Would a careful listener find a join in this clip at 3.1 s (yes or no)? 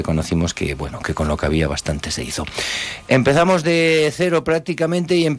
no